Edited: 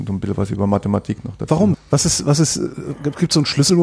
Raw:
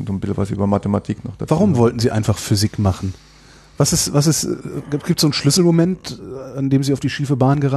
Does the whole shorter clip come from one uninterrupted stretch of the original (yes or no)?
no